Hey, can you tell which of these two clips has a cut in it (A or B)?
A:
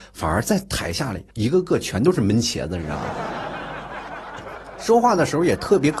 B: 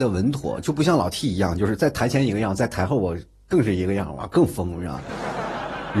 A